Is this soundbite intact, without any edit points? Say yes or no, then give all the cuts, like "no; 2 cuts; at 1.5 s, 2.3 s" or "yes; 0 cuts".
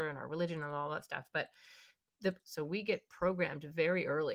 no; 1 cut; at 2.4 s